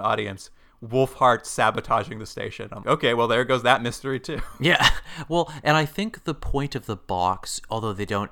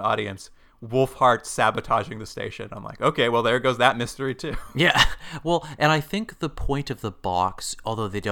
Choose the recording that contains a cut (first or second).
first